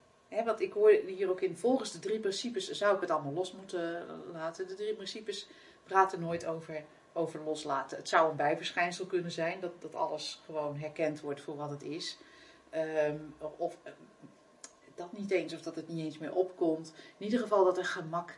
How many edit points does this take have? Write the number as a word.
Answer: zero